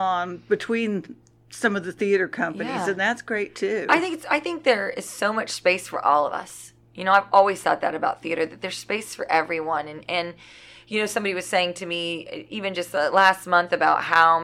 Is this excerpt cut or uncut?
uncut